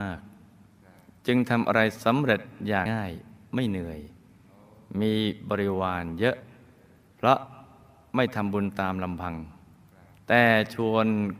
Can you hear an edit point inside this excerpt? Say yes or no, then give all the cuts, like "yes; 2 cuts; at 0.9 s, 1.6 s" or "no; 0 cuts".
yes; 1 cut; at 2.9 s